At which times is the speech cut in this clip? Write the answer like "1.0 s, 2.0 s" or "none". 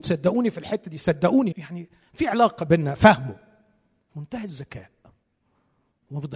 1.5 s